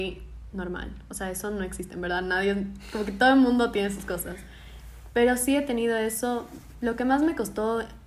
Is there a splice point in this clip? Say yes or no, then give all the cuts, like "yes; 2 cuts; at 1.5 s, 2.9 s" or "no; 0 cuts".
no; 0 cuts